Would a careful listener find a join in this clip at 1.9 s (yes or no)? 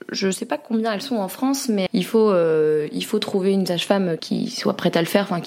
yes